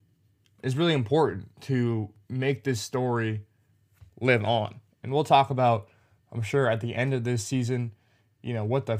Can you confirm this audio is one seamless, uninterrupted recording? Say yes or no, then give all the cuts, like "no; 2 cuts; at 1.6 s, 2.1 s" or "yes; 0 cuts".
yes; 0 cuts